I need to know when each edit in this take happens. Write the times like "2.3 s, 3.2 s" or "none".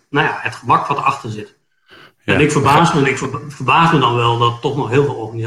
none